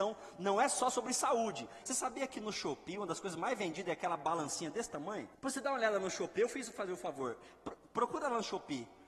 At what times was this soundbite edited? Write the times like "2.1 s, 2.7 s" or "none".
1.8 s, 5.3 s